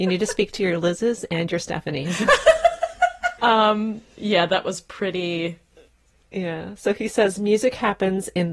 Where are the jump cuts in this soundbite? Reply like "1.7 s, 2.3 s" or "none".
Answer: 3.4 s